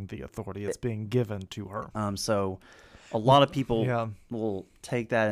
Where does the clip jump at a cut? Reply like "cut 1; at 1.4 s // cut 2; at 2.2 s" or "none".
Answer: cut 1; at 1.9 s